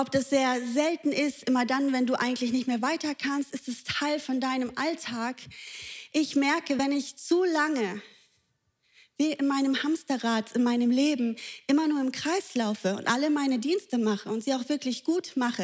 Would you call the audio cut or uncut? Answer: uncut